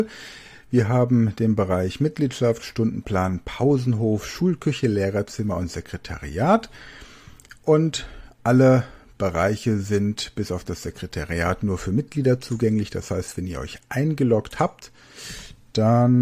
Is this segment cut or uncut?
uncut